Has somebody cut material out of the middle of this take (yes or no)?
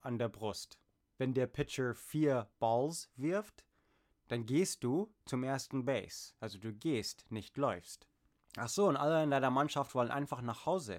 no